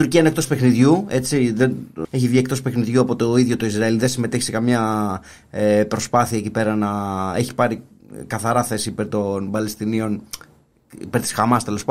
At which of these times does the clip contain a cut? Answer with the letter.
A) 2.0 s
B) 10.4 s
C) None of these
A